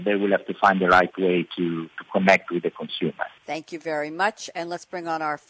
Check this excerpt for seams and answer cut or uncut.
cut